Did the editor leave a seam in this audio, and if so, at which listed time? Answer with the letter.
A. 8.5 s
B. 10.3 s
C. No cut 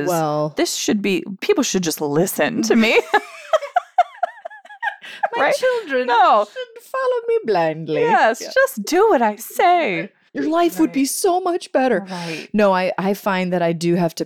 B